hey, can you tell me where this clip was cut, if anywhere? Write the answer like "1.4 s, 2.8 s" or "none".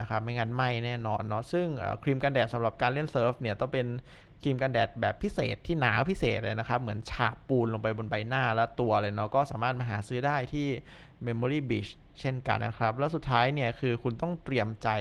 12.6 s